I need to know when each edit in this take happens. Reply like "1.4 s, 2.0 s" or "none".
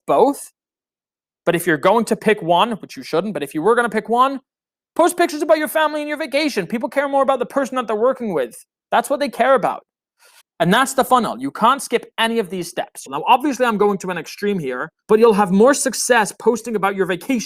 10.4 s, 13.1 s, 15.0 s